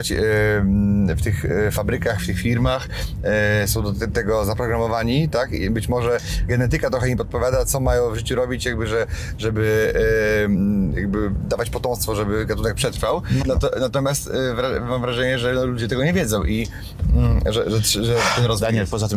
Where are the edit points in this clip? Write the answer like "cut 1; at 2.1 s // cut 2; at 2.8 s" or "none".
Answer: cut 1; at 13.4 s